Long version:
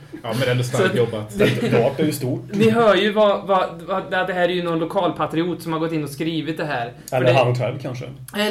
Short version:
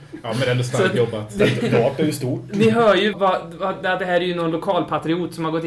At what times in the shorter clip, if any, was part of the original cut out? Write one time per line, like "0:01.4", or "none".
0:03.1